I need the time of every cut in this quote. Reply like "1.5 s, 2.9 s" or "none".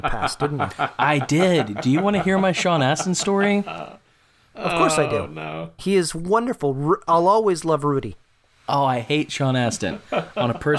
5.8 s